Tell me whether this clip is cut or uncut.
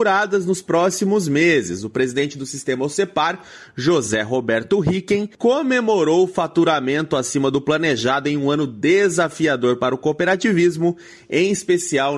cut